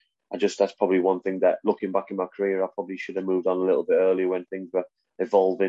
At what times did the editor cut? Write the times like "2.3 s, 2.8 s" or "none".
none